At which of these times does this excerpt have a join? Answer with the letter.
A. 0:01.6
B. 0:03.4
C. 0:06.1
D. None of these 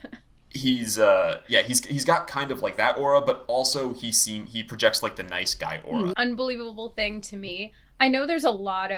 C